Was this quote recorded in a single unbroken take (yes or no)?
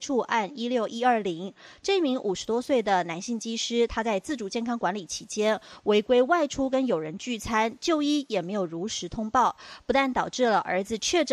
yes